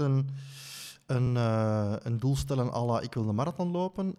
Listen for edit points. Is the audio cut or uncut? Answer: uncut